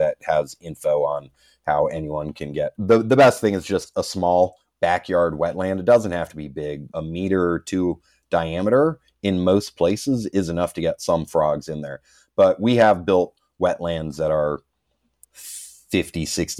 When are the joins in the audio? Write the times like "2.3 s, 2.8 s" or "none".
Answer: none

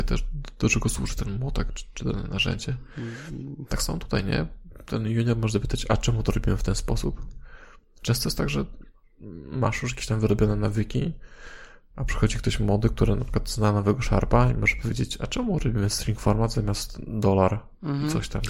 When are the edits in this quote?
none

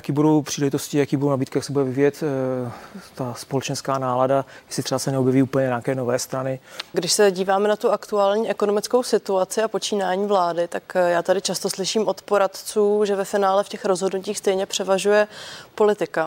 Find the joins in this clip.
6.9 s

